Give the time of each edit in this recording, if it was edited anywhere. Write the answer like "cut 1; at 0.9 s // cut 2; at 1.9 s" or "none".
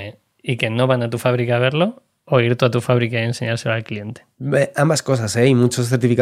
none